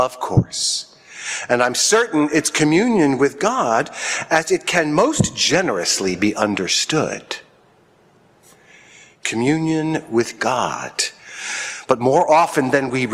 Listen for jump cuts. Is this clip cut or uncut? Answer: uncut